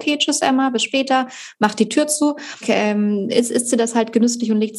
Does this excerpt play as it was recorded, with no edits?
yes; 0 cuts

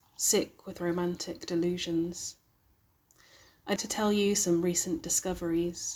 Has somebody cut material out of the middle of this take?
yes; 1 cut; at 3.8 s

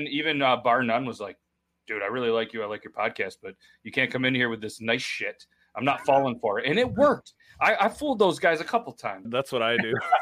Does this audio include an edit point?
yes; 1 cut; at 9.3 s

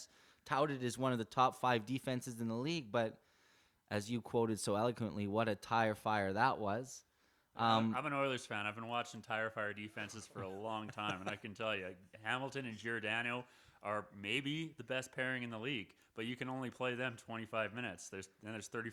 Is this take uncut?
yes; 0 cuts

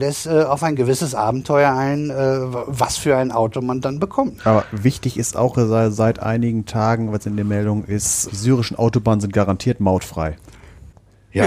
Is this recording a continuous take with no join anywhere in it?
no; 2 cuts; at 4.4 s, 8.3 s

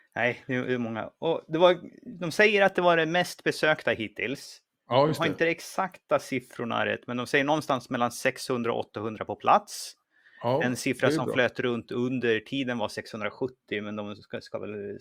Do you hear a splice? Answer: no; 0 cuts

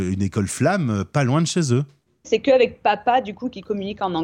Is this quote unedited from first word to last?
no; 1 cut; at 2.2 s

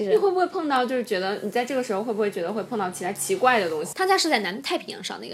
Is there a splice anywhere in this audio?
yes; 1 cut; at 3.9 s

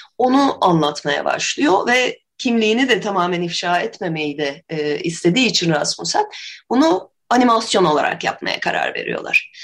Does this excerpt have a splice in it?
no; 0 cuts

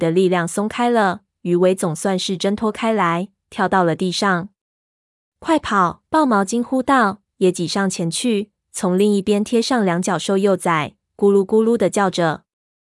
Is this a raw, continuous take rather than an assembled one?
no; 1 cut; at 6.1 s

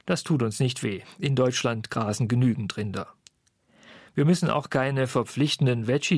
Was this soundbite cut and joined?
no; 0 cuts

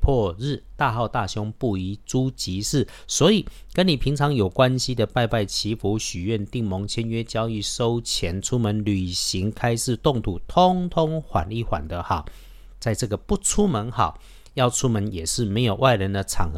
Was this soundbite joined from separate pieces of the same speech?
no; 0 cuts

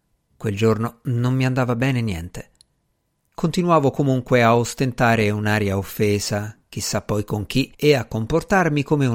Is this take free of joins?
no; 2 cuts; at 3.3 s, 7.7 s

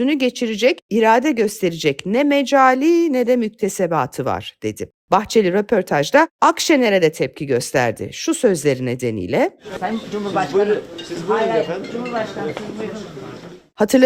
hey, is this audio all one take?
yes; 0 cuts

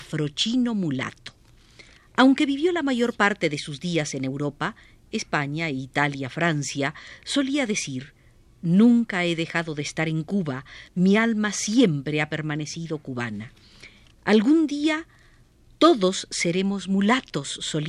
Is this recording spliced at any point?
yes; 2 cuts; at 2.0 s, 14.1 s

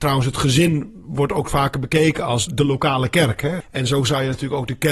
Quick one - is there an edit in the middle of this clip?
yes; 2 cuts; at 2.5 s, 3.6 s

